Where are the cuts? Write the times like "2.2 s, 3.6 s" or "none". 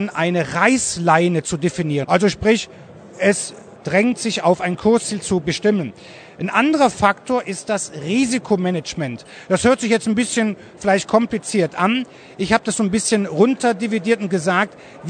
2.0 s